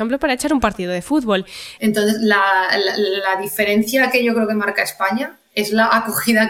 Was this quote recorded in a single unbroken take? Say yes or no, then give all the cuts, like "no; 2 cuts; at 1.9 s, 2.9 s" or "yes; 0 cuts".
no; 1 cut; at 1.8 s